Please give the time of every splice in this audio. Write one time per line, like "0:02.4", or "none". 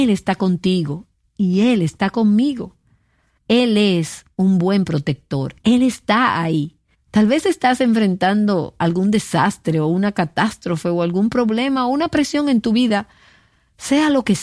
0:03.4
0:05.6
0:06.9

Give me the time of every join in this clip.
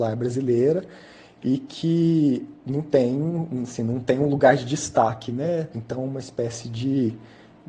0:05.7

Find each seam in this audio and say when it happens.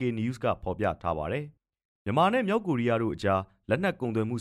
0:01.6

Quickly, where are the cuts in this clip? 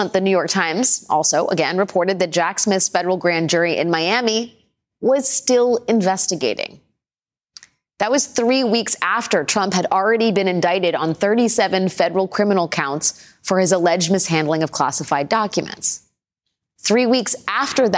none

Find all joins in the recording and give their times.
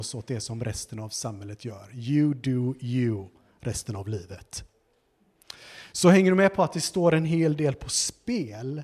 none

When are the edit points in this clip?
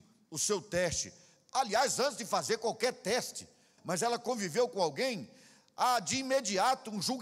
0:03.8

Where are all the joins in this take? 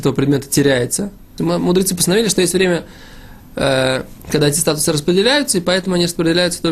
0:01.4

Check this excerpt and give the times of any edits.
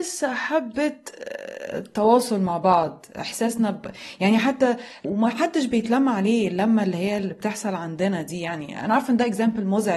0:05.0

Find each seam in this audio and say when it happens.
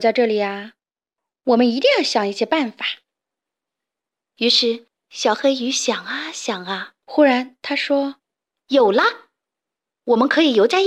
0:07.0
0:08.2

